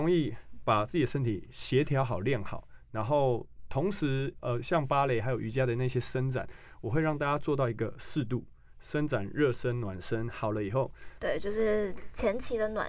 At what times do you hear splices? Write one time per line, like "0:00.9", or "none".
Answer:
0:11.2